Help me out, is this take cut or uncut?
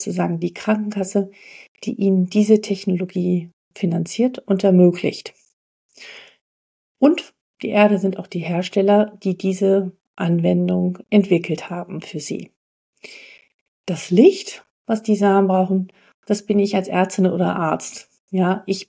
uncut